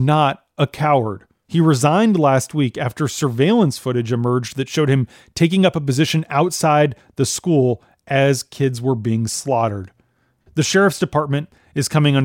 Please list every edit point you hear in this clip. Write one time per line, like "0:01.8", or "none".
0:01.4
0:10.5